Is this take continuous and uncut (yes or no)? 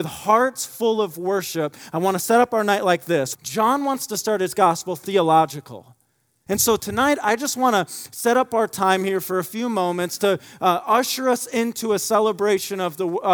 no